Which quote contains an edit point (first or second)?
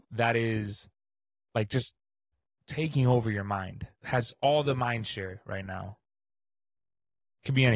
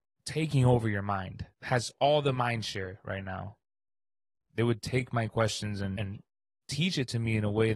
second